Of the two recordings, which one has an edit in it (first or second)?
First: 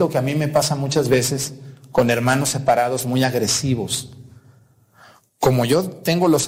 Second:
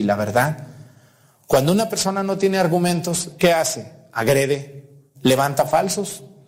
second